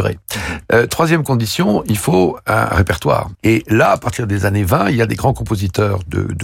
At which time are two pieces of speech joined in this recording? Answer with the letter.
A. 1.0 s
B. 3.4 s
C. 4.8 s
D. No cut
B